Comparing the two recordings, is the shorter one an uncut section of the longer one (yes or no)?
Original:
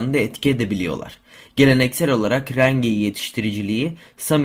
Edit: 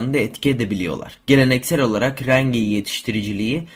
no